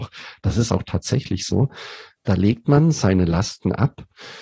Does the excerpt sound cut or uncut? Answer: cut